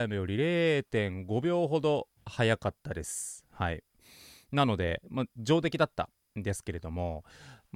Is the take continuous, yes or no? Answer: yes